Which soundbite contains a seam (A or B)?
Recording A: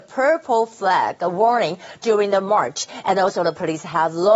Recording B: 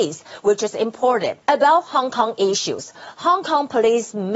B